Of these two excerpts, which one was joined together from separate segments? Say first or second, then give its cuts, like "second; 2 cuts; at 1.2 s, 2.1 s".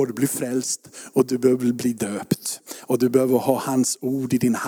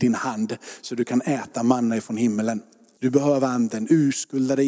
second; 1 cut; at 3.0 s